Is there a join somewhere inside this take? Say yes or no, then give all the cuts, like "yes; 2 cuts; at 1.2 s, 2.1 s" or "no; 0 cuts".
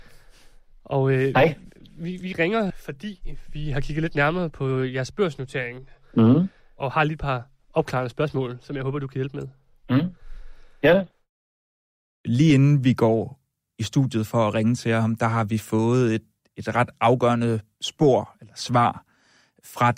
yes; 1 cut; at 2.7 s